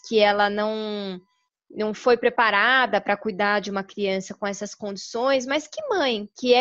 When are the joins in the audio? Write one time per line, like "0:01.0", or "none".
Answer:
none